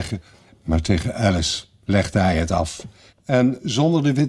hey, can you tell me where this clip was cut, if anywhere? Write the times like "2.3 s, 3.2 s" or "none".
3.1 s